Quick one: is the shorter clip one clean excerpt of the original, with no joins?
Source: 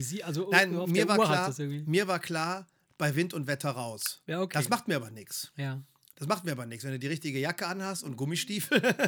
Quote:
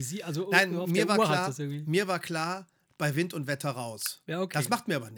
yes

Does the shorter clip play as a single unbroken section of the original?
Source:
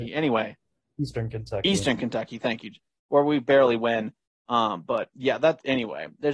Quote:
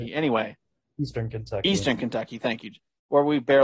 yes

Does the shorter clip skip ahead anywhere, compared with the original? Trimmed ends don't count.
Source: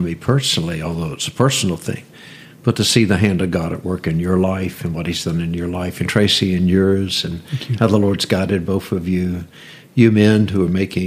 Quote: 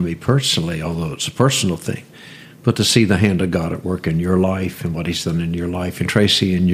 no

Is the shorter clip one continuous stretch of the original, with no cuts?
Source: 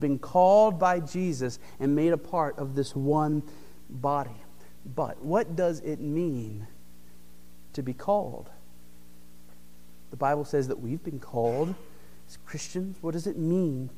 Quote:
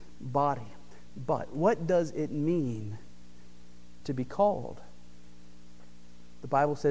yes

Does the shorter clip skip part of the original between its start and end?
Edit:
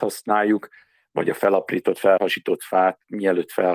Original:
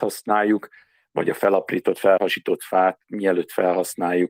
no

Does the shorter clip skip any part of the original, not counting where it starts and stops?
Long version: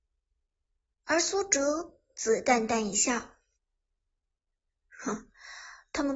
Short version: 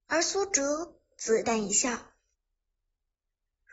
yes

